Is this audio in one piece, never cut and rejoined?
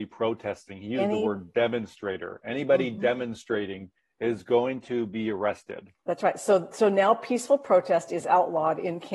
yes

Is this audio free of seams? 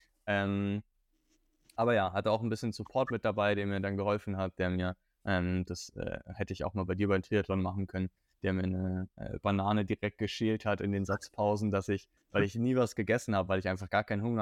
yes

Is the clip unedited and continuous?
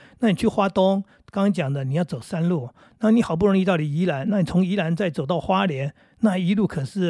yes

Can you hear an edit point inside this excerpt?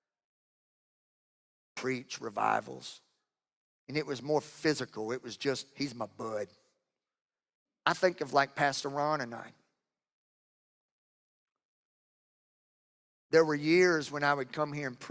yes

